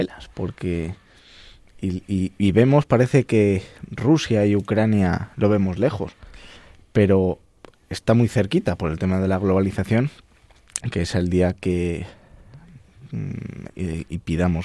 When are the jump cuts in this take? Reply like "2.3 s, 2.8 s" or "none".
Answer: 10.9 s, 13.7 s